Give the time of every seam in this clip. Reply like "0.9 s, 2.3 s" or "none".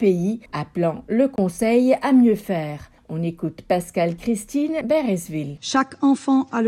5.6 s

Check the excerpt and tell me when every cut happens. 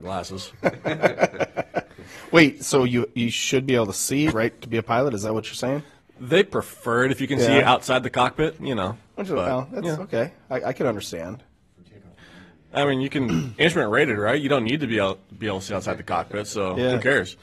4.3 s, 8.6 s

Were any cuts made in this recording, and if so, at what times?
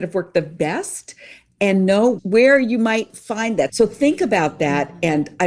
3.7 s

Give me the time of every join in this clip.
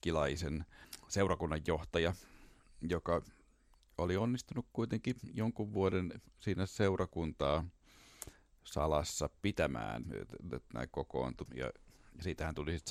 10.0 s, 11.5 s

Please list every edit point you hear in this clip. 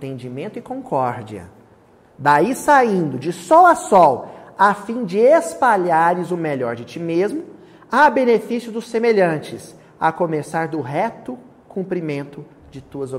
none

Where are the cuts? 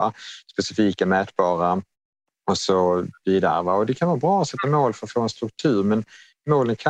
none

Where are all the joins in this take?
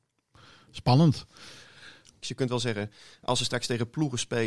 2.2 s

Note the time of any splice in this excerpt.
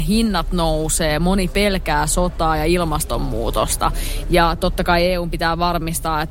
4.2 s

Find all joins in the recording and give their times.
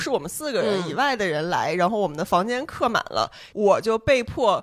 3.5 s

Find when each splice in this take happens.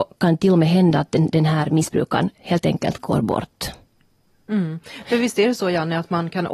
none

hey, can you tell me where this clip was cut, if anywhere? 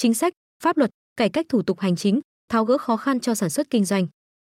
none

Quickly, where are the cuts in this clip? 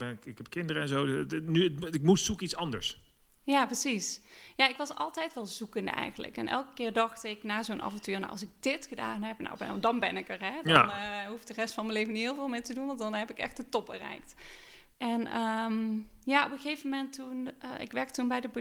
14.9 s

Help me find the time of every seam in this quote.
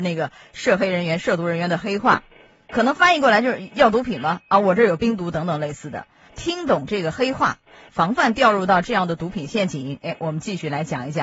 6.3 s, 7.9 s

